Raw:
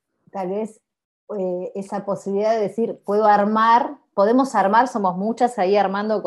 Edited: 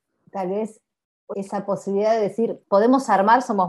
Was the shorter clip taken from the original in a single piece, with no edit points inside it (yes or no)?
no